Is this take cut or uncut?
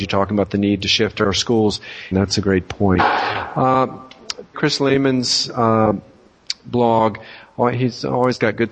cut